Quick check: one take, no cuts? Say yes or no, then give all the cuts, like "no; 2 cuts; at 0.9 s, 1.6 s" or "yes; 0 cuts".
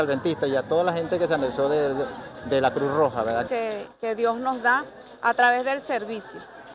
no; 1 cut; at 3.5 s